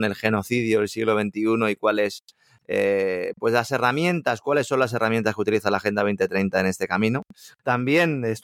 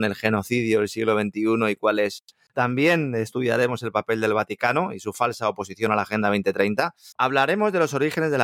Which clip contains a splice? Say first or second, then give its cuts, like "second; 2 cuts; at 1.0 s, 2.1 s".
second; 2 cuts; at 2.5 s, 7.1 s